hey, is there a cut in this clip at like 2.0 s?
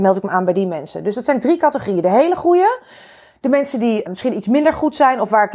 no; 1 cut; at 4.1 s

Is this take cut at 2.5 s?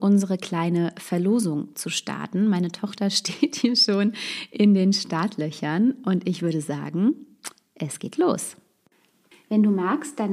no; 1 cut; at 9.3 s

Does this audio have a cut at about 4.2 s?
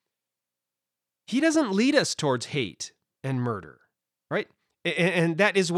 yes; 1 cut; at 4.2 s

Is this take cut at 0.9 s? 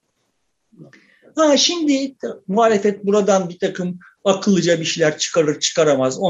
no; 0 cuts

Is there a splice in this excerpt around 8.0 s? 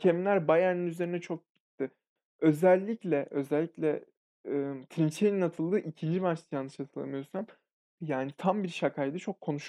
yes; 1 cut; at 8.0 s

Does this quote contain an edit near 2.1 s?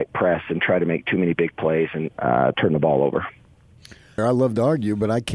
yes; 2 cuts; at 2.1 s, 4.2 s

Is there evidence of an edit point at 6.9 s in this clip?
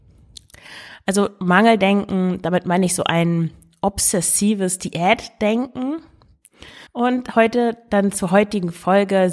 yes; 1 cut; at 6.9 s

